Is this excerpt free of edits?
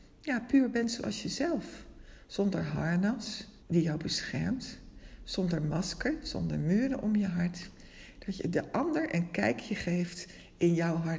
no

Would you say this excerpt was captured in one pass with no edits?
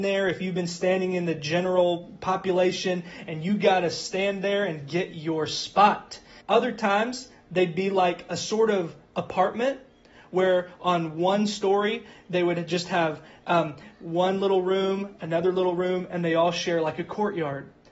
no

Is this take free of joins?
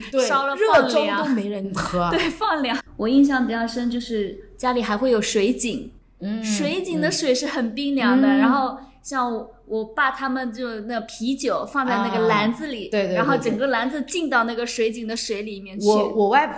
no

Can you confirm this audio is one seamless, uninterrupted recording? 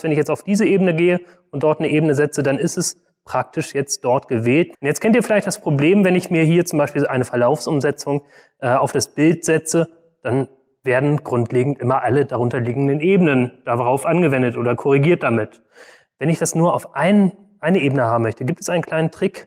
no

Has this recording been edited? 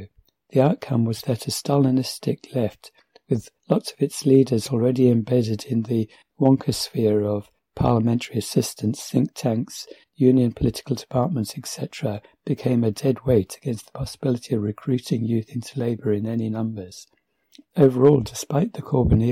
yes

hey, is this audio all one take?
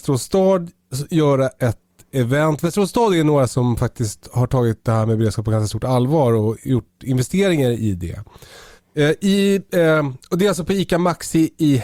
yes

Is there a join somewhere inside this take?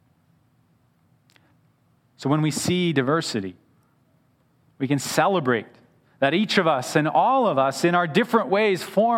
no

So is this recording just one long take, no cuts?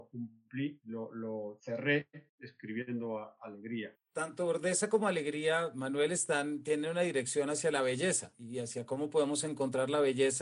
no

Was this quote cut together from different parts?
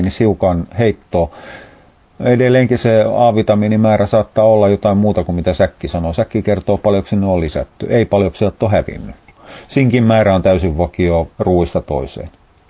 no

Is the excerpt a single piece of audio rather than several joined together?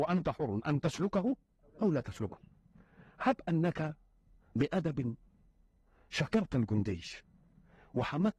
yes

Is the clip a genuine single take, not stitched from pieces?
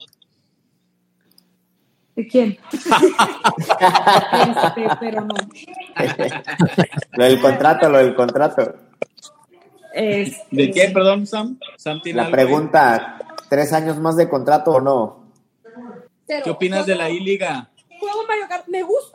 no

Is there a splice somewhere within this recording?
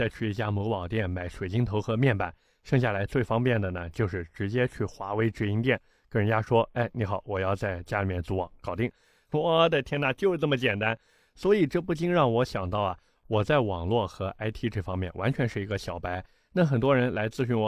no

